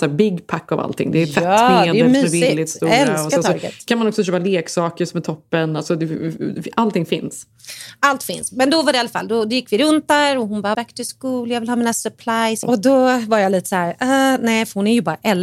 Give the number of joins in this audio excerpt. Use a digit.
2